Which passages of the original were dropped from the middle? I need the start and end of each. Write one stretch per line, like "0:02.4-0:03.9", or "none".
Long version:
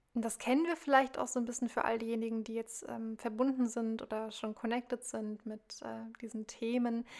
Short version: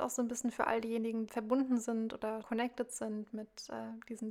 0:02.5-0:03.2
0:04.3-0:04.5